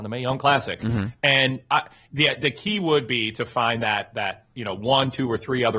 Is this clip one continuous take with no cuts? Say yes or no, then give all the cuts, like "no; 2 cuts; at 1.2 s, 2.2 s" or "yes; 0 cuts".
yes; 0 cuts